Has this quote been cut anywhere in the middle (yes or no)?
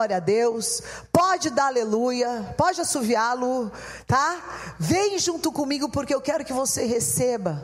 no